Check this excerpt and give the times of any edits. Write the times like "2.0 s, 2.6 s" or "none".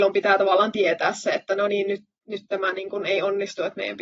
none

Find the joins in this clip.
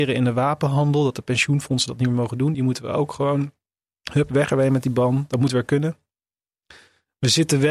none

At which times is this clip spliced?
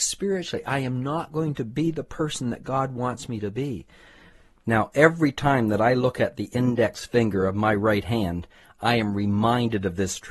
none

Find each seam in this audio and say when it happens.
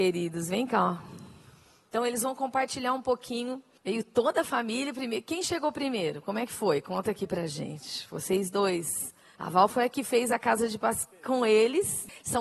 none

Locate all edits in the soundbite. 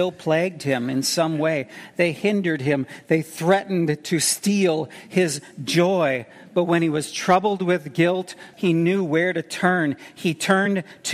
8.5 s

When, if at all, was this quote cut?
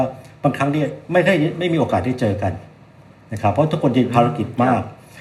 none

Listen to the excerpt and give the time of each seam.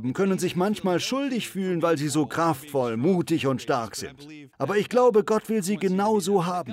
4.5 s

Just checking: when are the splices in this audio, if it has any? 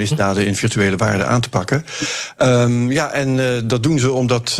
none

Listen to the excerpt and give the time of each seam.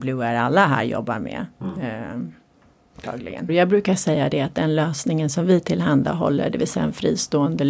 3.5 s

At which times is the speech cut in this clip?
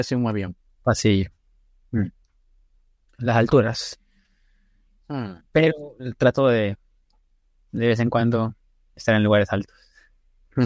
3.2 s

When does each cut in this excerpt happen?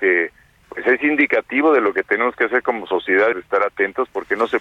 3.3 s

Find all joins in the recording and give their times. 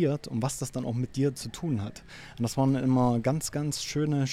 none

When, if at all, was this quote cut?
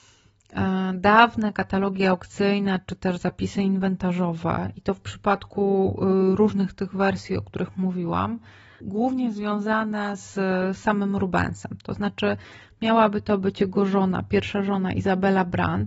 8.8 s

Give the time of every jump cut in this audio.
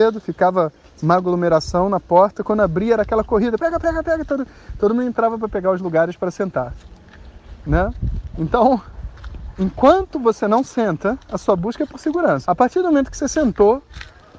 3.6 s, 12.5 s

